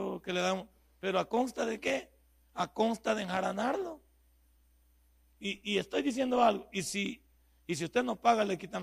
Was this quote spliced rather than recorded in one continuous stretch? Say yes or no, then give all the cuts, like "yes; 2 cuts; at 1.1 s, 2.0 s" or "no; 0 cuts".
no; 0 cuts